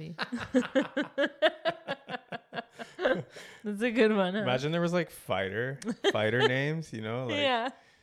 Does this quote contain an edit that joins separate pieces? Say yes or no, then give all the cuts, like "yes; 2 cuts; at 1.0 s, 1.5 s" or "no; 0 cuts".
no; 0 cuts